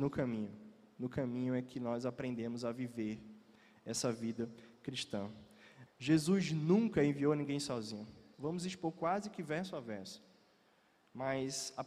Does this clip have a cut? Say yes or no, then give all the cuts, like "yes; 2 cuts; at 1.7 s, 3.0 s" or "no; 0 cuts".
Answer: yes; 2 cuts; at 5.9 s, 8.3 s